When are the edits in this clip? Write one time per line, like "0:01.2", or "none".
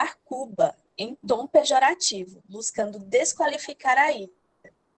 none